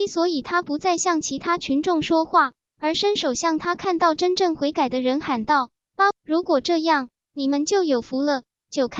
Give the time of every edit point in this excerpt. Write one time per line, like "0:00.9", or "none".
0:06.1